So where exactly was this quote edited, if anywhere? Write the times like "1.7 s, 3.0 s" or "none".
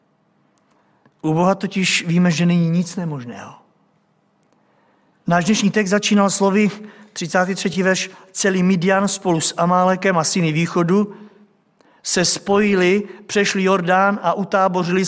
none